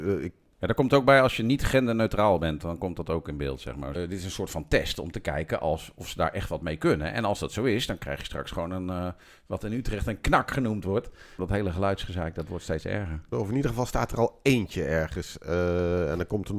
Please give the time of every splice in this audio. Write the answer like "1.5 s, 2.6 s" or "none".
3.9 s, 11.4 s, 13.3 s